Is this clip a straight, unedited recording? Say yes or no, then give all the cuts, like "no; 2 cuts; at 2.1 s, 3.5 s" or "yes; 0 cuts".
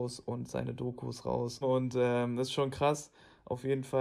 no; 1 cut; at 1.6 s